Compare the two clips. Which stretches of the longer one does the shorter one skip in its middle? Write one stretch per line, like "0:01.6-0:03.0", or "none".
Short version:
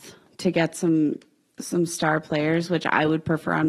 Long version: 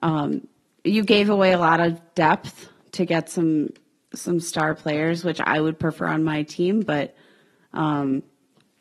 none